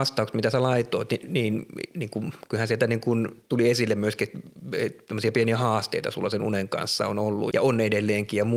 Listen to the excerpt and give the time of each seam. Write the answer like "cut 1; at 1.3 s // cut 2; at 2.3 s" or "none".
cut 1; at 7.5 s